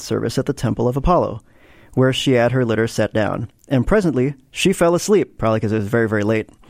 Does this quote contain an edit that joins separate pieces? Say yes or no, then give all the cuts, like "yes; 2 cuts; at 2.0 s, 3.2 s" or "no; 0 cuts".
no; 0 cuts